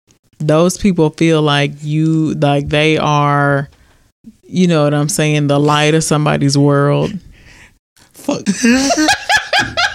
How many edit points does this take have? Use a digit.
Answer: 0